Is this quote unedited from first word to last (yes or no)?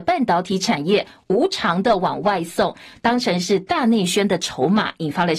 yes